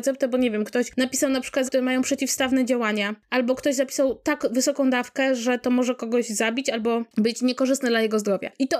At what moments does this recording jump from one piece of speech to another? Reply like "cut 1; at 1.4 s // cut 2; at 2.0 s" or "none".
cut 1; at 1.7 s